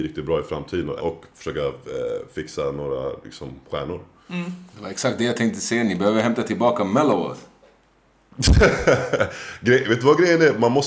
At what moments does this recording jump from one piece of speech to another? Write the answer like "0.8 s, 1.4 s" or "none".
1.0 s